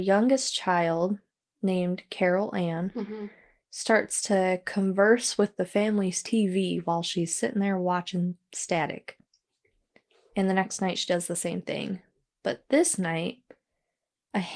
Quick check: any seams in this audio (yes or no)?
no